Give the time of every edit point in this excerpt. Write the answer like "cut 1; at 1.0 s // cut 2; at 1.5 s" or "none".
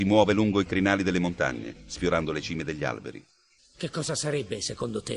cut 1; at 3.6 s